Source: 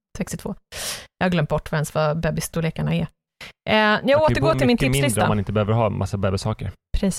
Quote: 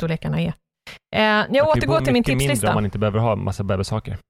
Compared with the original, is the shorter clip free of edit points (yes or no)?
yes